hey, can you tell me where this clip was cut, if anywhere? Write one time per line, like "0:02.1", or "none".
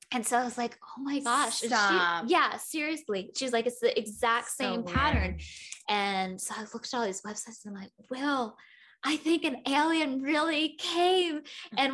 0:05.8